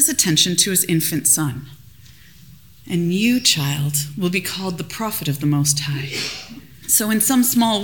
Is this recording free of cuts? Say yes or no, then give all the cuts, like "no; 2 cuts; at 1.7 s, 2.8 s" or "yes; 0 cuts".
no; 1 cut; at 6.8 s